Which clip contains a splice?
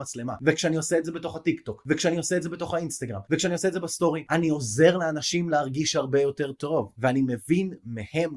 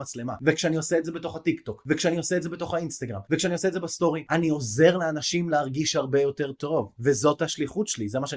first; 1 cut; at 6.9 s

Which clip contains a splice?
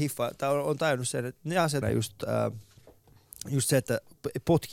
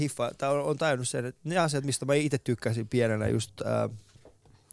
first; 1 cut; at 1.8 s

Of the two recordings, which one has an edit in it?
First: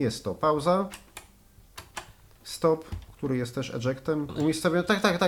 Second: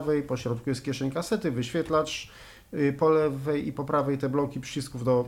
first; 1 cut; at 4.3 s

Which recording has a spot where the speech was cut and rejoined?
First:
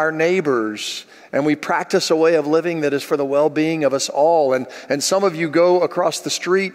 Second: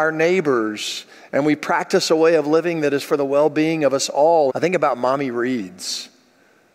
second; 1 cut; at 4.5 s

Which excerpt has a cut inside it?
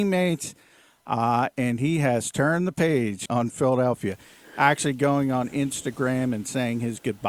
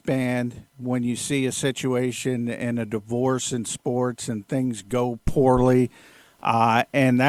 first; 1 cut; at 3.3 s

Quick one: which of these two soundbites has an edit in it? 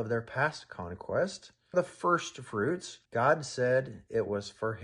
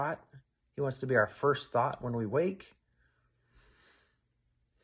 first; 2 cuts; at 1.7 s, 3.1 s

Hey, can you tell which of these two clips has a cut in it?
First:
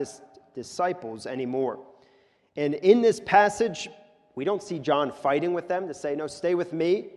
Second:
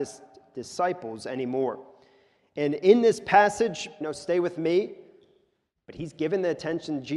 second; 1 cut; at 4.0 s

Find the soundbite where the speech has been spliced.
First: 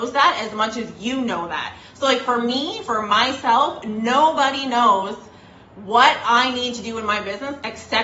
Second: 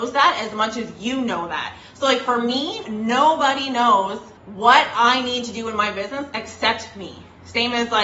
second; 2 cuts; at 2.8 s, 4.4 s

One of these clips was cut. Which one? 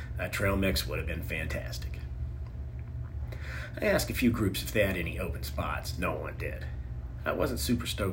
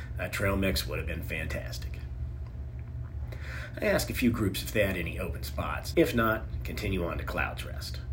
second; 1 cut; at 5.9 s

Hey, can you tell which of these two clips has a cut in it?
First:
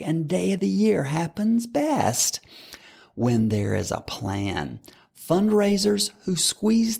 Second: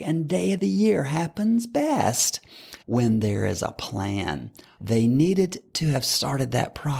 second; 2 cuts; at 2.8 s, 4.8 s

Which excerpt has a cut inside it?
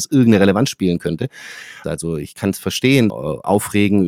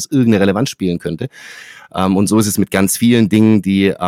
first; 2 cuts; at 1.8 s, 3.1 s

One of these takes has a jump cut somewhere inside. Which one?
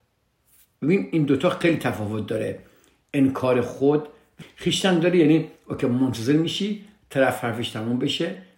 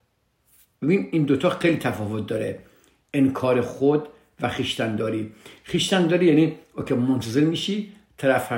first; 1 cut; at 4.4 s

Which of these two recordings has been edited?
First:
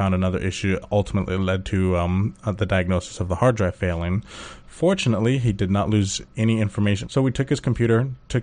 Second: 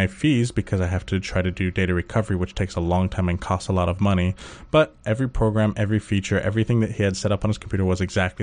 first; 1 cut; at 7.0 s

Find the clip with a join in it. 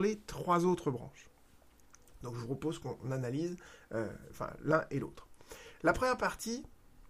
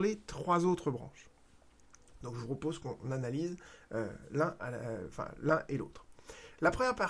first; 1 cut; at 4.3 s

